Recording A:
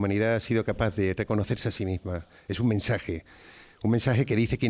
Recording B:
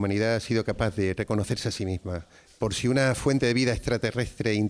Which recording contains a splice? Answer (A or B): B